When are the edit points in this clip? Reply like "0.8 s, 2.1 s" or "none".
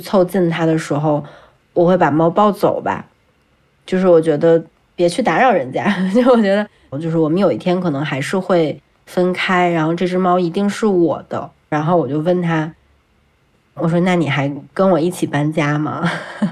6.9 s, 11.7 s